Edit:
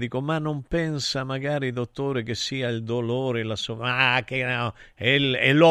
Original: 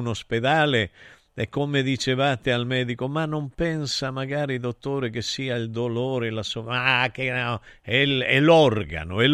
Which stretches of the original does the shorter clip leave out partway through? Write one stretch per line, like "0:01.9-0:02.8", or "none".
none